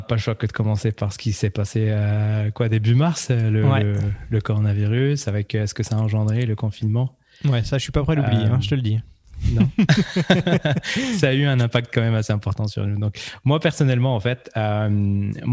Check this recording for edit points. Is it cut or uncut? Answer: uncut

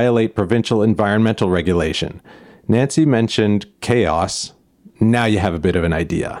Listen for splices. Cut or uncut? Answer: uncut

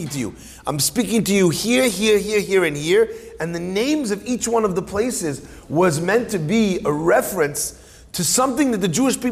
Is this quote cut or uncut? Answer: uncut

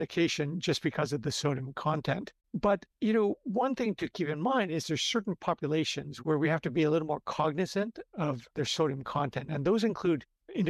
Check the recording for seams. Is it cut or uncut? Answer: uncut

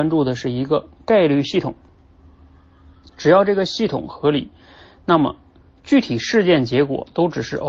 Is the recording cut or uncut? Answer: uncut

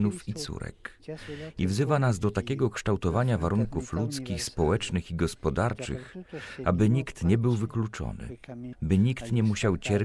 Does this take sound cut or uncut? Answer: cut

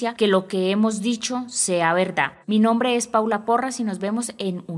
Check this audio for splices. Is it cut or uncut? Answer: cut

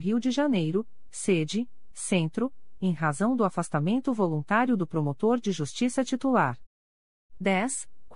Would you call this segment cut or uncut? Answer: uncut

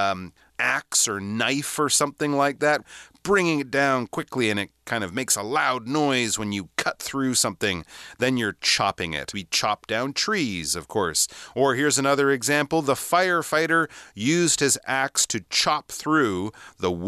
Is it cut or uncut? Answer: uncut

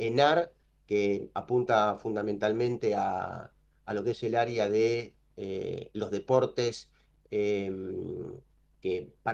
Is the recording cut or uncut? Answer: uncut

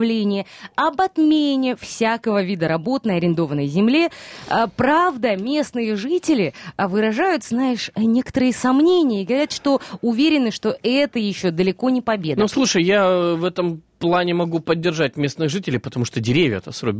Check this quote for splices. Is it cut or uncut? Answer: uncut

